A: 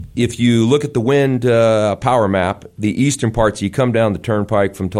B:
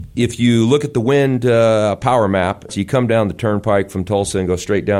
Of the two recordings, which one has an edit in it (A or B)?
B